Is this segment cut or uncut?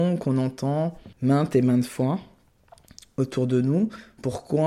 cut